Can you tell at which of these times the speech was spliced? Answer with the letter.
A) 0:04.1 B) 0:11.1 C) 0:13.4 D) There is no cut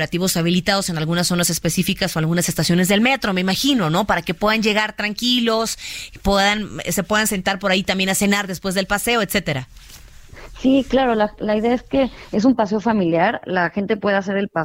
D